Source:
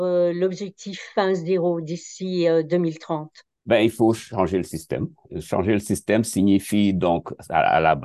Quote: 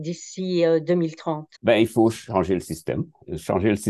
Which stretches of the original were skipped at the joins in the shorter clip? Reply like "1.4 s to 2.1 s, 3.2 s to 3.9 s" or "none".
3.4 s to 3.6 s